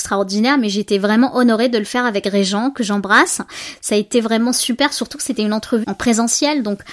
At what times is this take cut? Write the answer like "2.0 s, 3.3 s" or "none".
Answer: 5.8 s